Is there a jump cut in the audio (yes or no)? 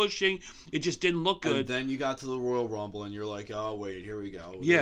no